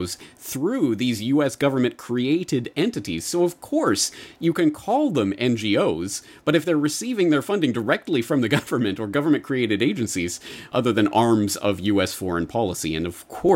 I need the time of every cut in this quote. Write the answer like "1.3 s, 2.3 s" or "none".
10.7 s